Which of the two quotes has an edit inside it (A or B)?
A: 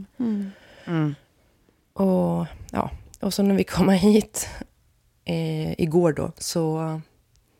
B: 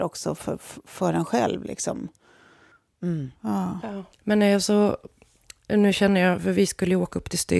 B